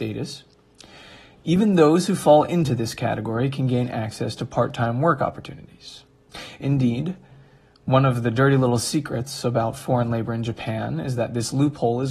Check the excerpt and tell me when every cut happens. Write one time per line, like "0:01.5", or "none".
none